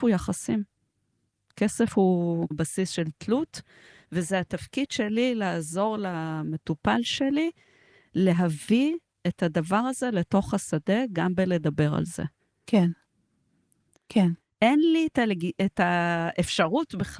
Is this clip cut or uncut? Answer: cut